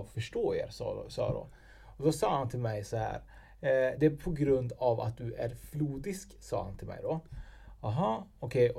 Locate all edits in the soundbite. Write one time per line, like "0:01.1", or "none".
none

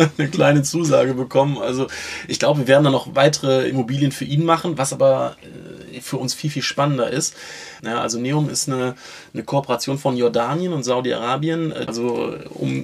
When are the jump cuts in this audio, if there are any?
0:07.8

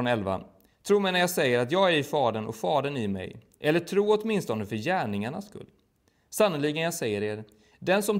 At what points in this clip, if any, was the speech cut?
none

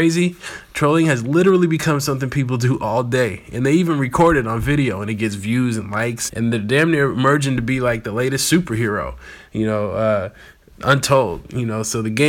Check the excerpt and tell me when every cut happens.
0:06.3

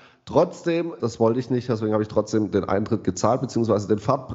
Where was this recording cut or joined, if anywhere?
0:01.0

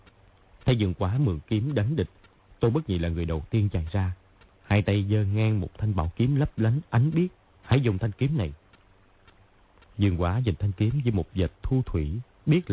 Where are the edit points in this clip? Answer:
0:07.5

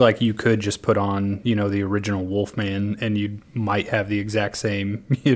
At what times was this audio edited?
none

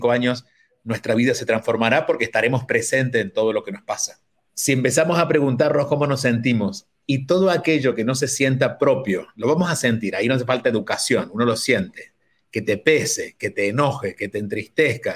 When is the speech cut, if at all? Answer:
0:04.5

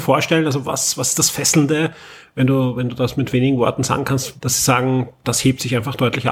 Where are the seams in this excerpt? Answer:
0:04.4

